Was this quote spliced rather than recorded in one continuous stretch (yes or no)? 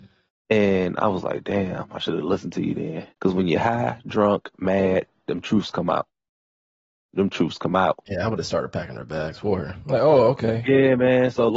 yes